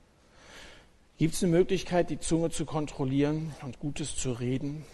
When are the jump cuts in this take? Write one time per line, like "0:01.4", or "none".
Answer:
none